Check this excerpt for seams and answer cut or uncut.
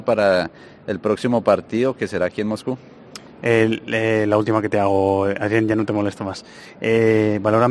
uncut